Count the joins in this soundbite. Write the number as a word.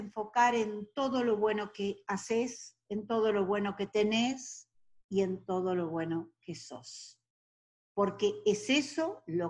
zero